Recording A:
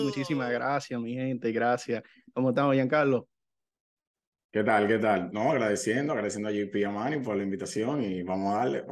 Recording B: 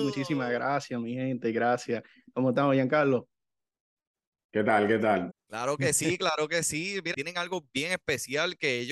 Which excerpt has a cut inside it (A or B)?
B